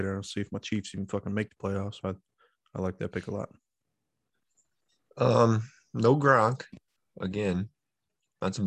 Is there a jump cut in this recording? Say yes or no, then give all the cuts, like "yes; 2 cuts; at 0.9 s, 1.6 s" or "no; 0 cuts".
yes; 1 cut; at 2.0 s